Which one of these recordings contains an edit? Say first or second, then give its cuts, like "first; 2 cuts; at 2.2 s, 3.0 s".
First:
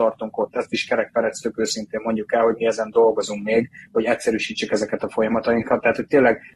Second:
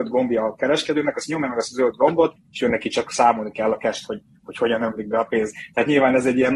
second; 1 cut; at 2.4 s